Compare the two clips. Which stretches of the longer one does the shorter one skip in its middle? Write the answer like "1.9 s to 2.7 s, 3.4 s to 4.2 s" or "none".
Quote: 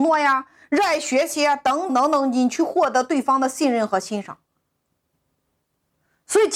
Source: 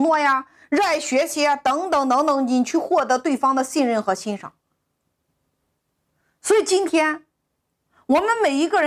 1.9 s to 2.0 s